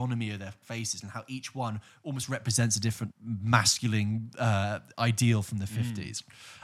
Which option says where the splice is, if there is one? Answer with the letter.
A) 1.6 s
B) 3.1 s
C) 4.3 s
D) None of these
B